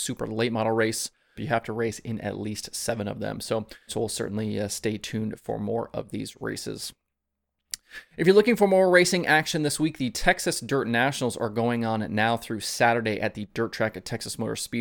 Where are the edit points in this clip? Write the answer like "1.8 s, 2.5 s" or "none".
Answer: 1.4 s, 3.9 s